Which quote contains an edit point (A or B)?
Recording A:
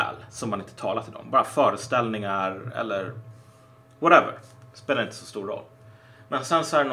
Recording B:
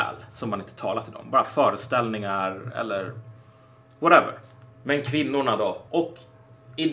B